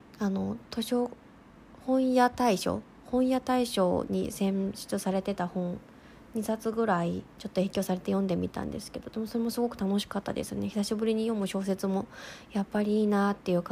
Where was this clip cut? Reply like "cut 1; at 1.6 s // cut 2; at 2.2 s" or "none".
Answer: cut 1; at 7.3 s